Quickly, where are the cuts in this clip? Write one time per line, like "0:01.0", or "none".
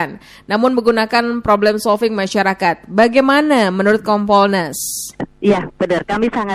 0:05.2